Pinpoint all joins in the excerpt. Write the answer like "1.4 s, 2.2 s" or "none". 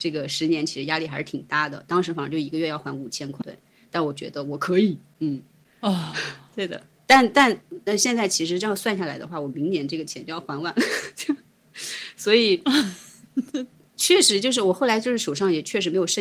3.4 s